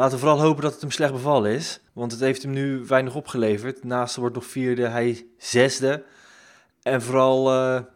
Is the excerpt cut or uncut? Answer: cut